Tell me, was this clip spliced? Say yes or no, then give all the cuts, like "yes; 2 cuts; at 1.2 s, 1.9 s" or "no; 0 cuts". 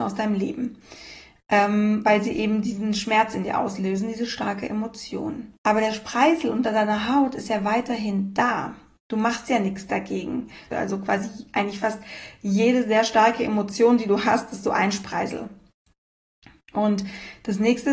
yes; 2 cuts; at 5.6 s, 10.7 s